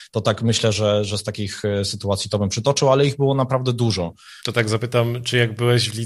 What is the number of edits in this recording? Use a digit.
1